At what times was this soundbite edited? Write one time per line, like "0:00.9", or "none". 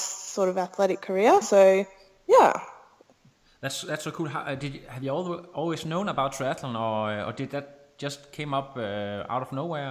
none